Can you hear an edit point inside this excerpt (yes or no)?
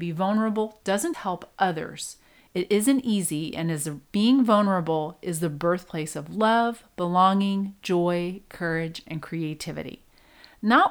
yes